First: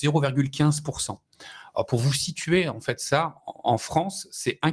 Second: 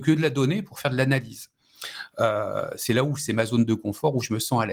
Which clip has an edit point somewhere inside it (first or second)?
first